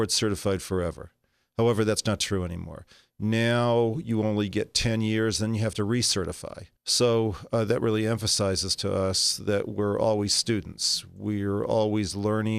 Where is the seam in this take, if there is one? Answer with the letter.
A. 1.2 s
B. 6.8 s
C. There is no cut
B